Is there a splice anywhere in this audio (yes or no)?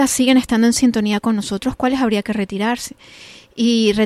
no